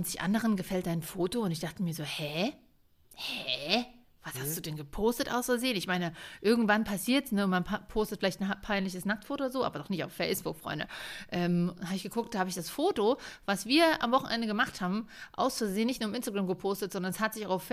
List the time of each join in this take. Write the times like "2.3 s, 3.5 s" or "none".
none